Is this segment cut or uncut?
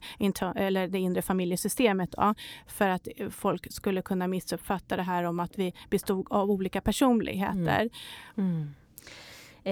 cut